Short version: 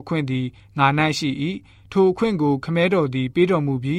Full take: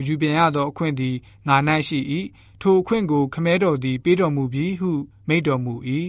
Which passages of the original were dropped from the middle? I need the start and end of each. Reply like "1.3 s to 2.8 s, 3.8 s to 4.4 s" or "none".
none